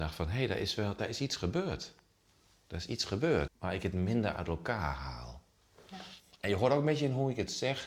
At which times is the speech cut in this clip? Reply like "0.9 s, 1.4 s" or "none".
3.5 s